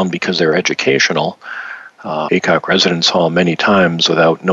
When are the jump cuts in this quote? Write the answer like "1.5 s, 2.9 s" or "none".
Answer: 2.3 s